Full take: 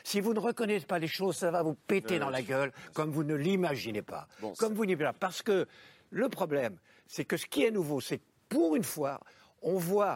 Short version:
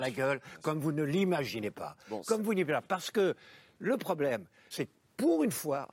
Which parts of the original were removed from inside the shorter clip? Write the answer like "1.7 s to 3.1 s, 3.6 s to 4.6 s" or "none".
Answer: 7.0 s to 8.0 s